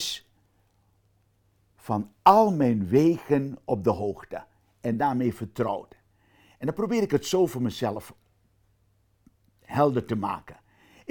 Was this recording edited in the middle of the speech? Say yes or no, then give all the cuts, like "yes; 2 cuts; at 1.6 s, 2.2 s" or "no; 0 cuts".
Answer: no; 0 cuts